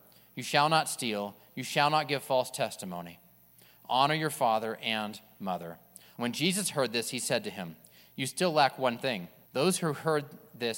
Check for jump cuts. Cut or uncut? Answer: cut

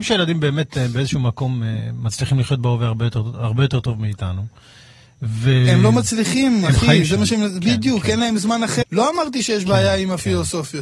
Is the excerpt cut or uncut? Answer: cut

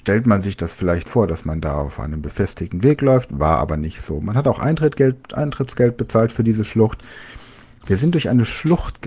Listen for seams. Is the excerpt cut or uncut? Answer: cut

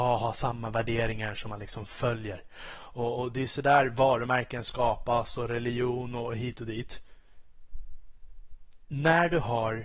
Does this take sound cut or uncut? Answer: uncut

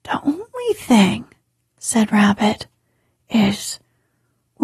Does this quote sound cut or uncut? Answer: uncut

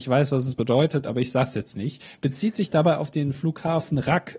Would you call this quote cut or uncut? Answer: uncut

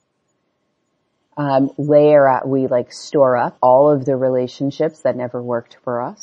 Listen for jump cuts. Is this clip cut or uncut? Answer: cut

